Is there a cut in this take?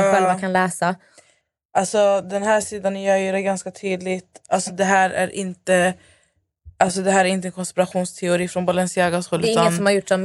no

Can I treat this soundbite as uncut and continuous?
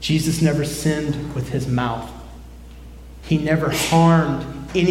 yes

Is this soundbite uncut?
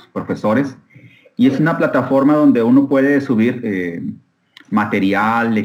yes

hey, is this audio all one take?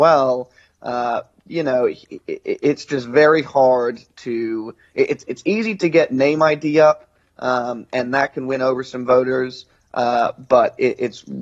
yes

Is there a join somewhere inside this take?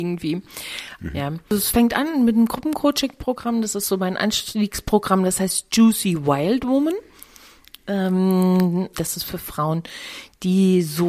yes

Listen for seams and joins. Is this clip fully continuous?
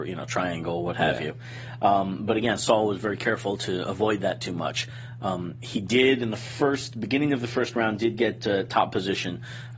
yes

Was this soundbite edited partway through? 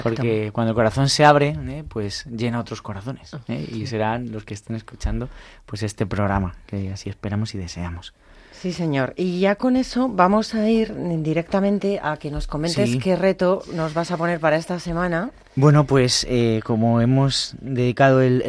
no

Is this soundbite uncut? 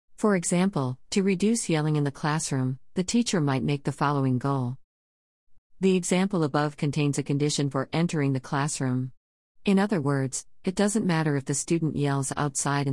no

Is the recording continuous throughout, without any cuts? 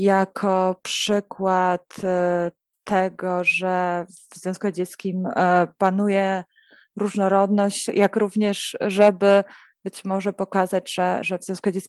no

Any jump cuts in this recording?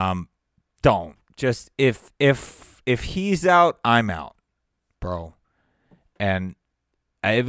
no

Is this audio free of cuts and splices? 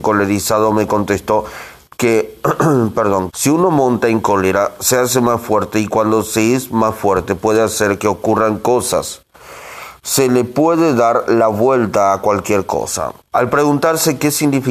no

